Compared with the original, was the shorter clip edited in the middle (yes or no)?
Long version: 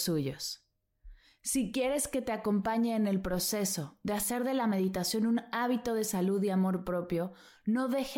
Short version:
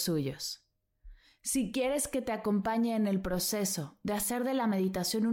no